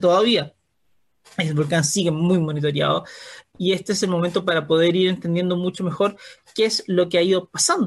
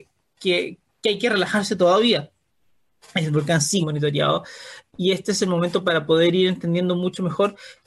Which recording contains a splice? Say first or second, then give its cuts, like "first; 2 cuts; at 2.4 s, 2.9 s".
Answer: second; 1 cut; at 3.8 s